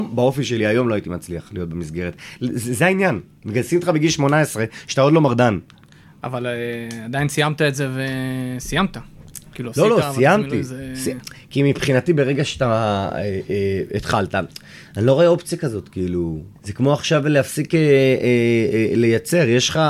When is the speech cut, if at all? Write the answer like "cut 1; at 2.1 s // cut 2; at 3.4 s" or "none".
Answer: cut 1; at 16.6 s

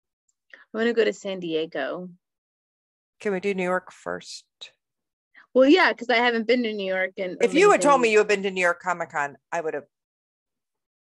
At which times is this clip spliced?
cut 1; at 7.4 s

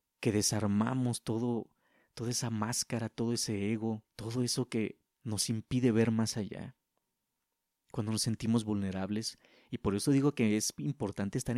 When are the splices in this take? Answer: cut 1; at 4.1 s

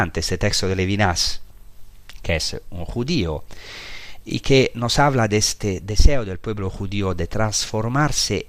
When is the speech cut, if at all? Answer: none

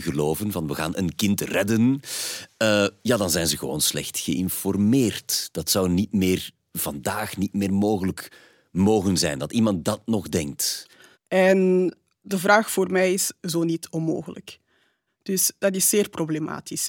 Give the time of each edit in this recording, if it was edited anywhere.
cut 1; at 11.1 s // cut 2; at 13.4 s // cut 3; at 15.1 s

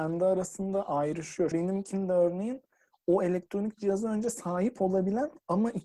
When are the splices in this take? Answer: cut 1; at 1.5 s

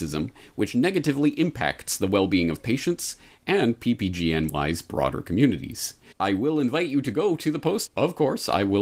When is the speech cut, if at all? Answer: cut 1; at 3.3 s // cut 2; at 6.1 s // cut 3; at 7.9 s

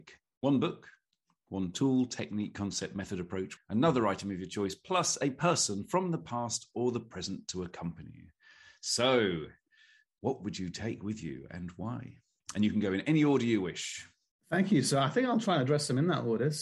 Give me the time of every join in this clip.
cut 1; at 3.6 s

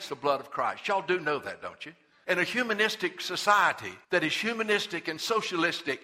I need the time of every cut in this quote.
cut 1; at 2.2 s // cut 2; at 4.0 s

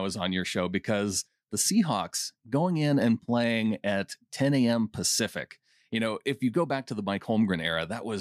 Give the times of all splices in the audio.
none

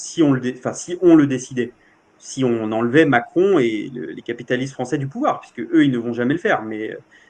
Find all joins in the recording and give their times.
none

